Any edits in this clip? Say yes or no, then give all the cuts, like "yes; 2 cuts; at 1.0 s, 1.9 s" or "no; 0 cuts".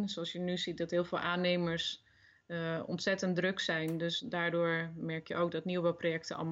no; 0 cuts